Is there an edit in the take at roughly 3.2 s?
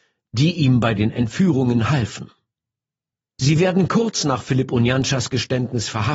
yes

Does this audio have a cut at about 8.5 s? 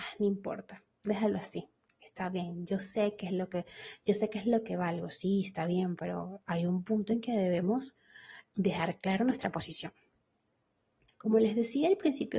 yes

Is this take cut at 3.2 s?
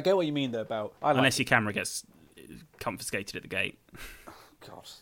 no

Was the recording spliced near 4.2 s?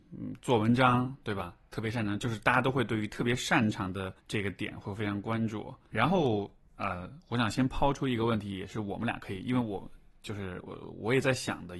yes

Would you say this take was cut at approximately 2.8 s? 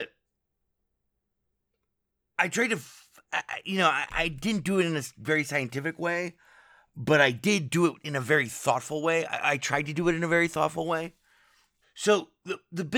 no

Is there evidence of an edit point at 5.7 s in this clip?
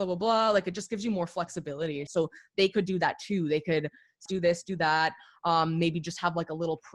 no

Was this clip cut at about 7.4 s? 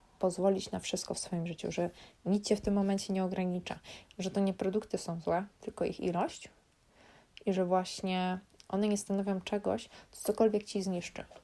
no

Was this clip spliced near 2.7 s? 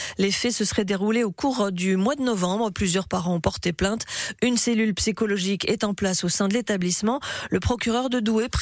no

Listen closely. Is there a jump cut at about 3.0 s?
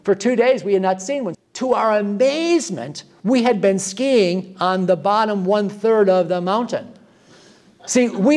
no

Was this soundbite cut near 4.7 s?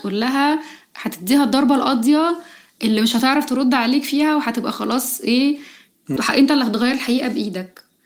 no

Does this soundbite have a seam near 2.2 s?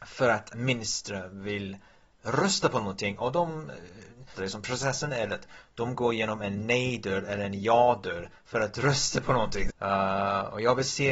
no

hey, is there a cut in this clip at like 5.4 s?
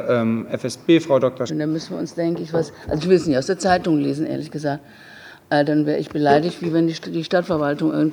no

